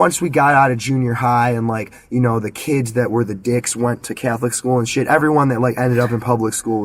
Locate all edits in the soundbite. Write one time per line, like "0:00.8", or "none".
none